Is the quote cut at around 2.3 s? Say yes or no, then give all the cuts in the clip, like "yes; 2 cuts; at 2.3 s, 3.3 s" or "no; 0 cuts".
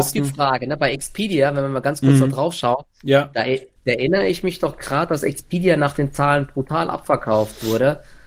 no; 1 cut; at 3.8 s